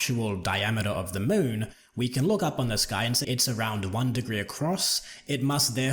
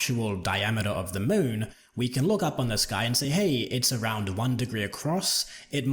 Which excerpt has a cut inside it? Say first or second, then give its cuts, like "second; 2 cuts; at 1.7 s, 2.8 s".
first; 1 cut; at 3.2 s